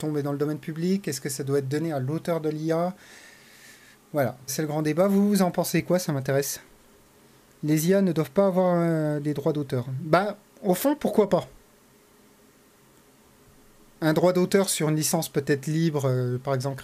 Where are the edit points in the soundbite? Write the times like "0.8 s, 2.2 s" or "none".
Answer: 4.5 s